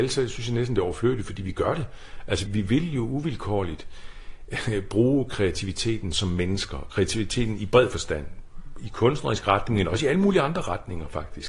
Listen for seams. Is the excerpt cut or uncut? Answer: cut